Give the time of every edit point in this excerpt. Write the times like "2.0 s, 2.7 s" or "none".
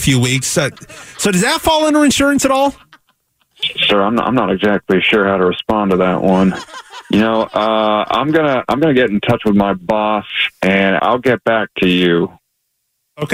8.1 s, 11.0 s